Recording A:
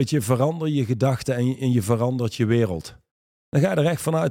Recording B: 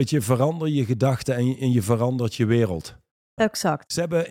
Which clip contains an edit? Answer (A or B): B